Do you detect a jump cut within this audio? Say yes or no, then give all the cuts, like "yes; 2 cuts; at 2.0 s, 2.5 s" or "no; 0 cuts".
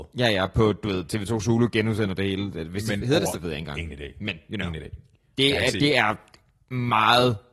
yes; 1 cut; at 3.3 s